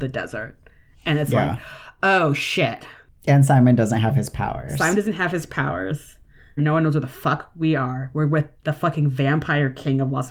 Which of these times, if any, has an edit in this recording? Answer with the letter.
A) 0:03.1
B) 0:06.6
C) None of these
B